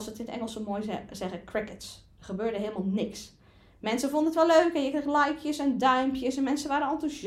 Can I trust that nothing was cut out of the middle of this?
yes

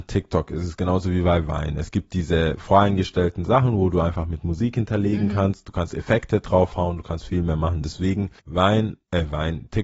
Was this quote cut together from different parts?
yes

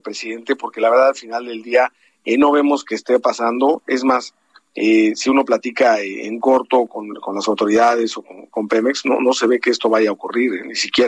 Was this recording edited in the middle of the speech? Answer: no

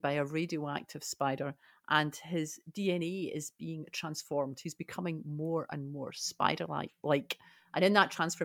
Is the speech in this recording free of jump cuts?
yes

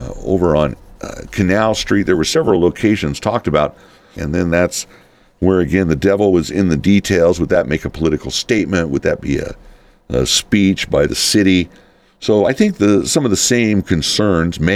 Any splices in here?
yes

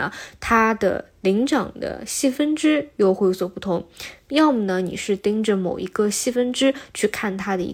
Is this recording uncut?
no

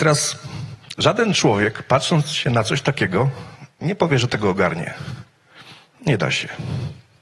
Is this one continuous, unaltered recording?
yes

